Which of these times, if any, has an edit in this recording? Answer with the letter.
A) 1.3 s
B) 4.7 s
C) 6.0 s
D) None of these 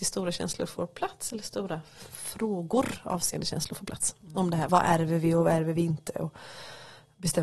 B